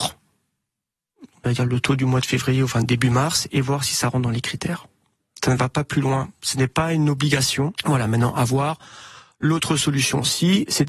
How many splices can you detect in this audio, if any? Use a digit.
1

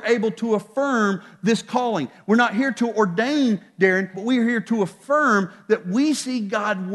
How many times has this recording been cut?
1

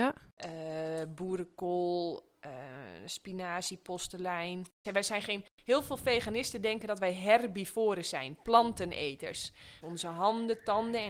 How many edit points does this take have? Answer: 2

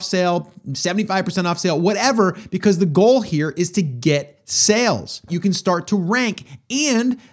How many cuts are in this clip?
1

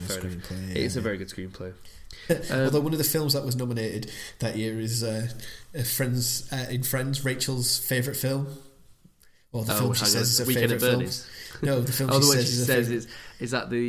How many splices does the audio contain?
0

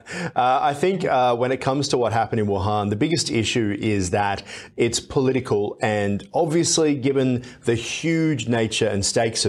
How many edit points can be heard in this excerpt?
0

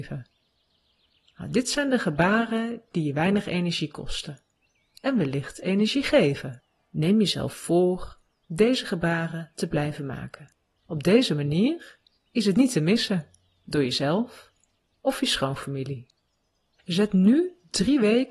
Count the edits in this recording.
2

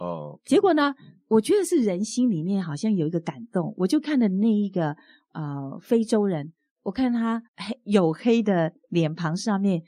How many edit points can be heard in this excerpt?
1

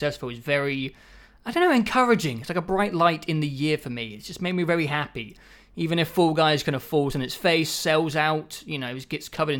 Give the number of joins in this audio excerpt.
0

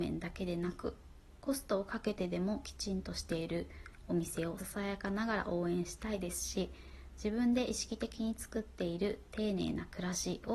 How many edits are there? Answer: 1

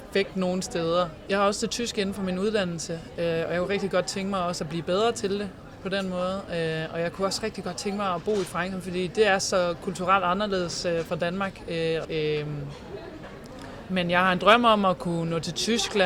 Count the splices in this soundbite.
2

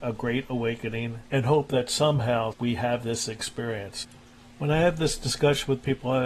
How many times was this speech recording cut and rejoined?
1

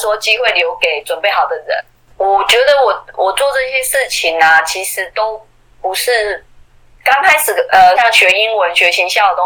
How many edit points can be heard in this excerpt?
2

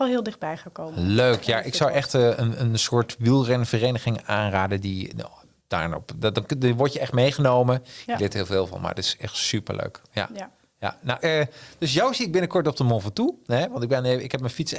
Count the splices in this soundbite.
2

